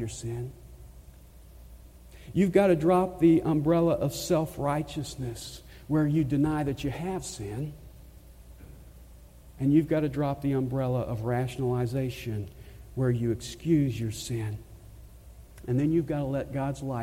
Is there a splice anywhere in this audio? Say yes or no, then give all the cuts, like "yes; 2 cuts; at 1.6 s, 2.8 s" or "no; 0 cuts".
no; 0 cuts